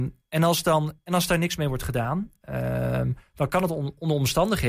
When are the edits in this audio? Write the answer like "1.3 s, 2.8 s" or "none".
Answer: none